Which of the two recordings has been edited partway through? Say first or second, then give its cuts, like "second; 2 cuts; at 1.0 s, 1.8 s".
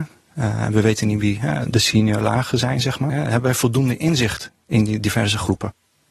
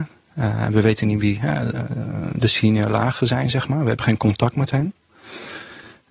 first; 2 cuts; at 1.6 s, 3.1 s